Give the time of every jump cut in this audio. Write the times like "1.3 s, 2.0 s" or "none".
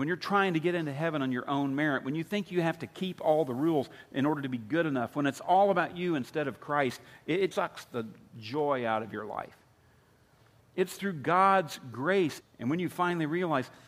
7.5 s, 10.6 s, 12.4 s